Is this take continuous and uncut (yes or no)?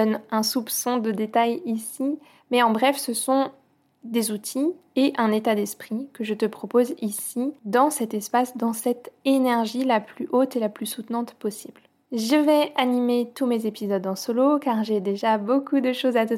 yes